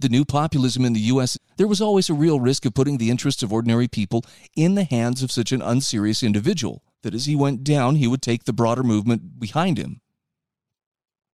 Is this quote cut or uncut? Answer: cut